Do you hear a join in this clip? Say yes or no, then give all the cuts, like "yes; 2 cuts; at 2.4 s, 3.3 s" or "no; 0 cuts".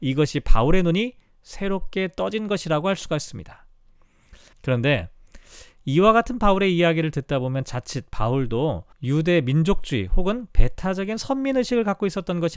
yes; 2 cuts; at 4.5 s, 8.9 s